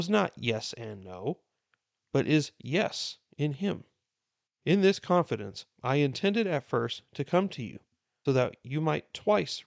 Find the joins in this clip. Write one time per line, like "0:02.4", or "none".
0:04.5
0:08.3